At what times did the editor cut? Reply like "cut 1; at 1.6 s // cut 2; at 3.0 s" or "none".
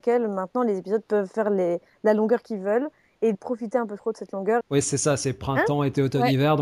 cut 1; at 3.3 s // cut 2; at 4.6 s